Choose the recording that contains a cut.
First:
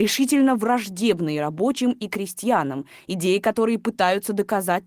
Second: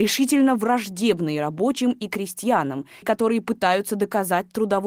second; 1 cut; at 3.0 s

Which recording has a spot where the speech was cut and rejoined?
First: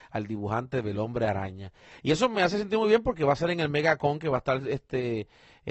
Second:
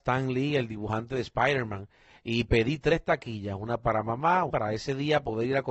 second; 1 cut; at 4.5 s

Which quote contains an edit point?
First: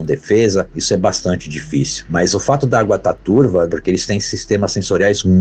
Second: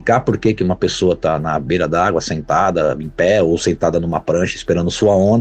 first; 1 cut; at 3.7 s

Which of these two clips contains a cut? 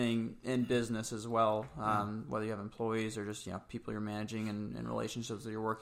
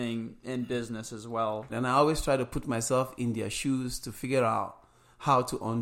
second; 1 cut; at 1.7 s

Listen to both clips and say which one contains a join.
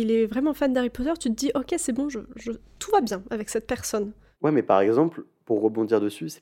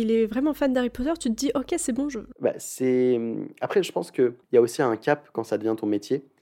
second; 2 cuts; at 2.3 s, 4.4 s

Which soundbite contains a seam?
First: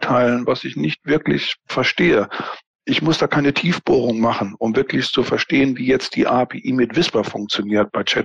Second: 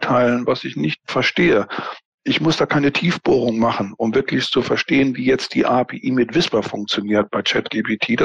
second; 1 cut; at 1.0 s

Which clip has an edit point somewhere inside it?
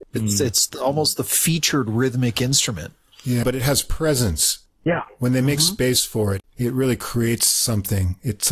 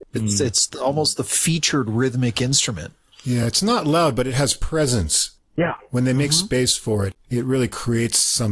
first; 1 cut; at 3.4 s

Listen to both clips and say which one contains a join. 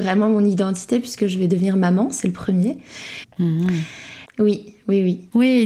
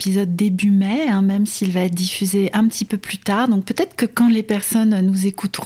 first; 2 cuts; at 3.2 s, 4.3 s

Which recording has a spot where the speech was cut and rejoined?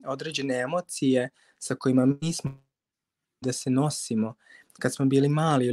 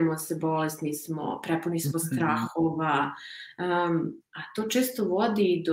second; 1 cut; at 4.2 s

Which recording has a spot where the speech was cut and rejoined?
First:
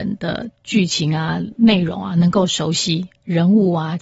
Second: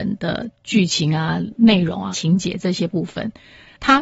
second; 1 cut; at 2.1 s

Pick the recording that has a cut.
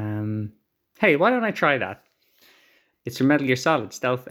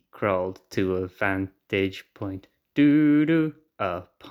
first; 1 cut; at 2.9 s

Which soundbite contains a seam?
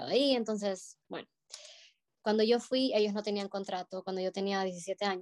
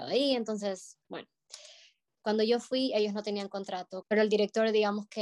second; 1 cut; at 4.0 s

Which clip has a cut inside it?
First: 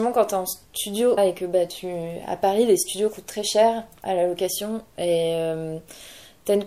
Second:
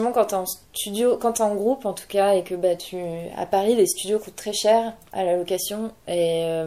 first; 1 cut; at 1.2 s

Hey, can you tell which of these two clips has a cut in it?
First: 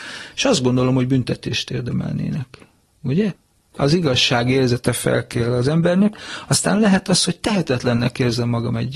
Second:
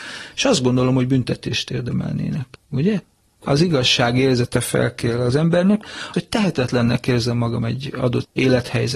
second; 2 cuts; at 2.6 s, 6.1 s

